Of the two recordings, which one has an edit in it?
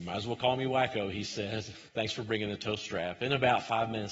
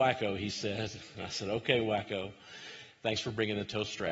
first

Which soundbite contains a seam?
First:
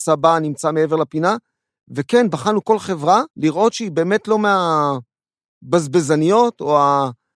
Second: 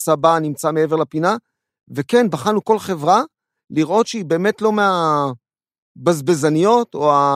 first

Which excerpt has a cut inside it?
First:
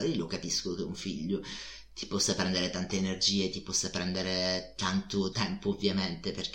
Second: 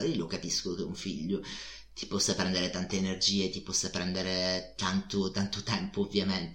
first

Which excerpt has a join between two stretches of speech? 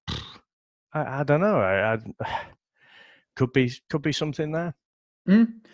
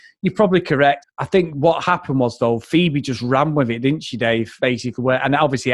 second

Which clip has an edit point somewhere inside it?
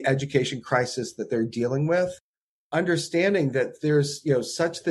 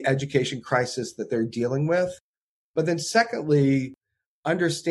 first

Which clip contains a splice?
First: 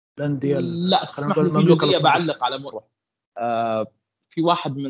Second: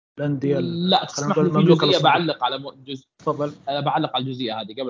first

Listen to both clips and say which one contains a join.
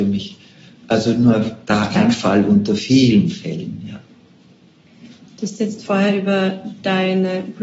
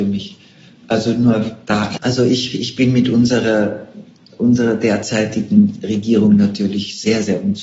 second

